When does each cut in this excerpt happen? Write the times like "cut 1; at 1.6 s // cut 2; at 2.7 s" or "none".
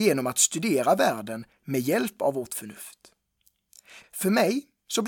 cut 1; at 4.0 s